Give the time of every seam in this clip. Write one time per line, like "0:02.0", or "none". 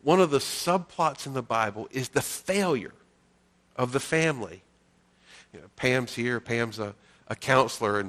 none